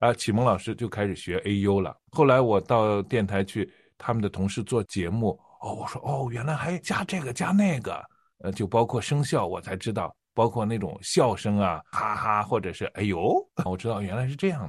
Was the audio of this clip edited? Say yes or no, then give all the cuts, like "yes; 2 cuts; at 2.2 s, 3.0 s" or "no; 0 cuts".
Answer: yes; 2 cuts; at 11.9 s, 13.7 s